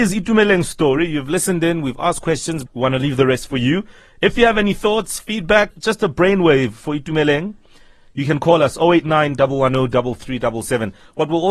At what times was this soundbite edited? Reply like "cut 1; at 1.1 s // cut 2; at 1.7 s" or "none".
cut 1; at 2.7 s // cut 2; at 5.7 s